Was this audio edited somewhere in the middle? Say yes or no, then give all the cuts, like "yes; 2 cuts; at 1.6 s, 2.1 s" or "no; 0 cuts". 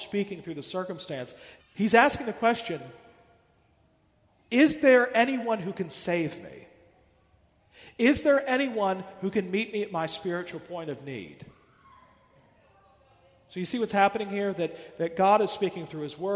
yes; 1 cut; at 1.6 s